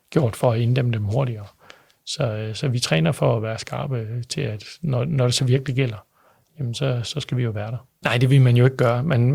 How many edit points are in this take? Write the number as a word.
one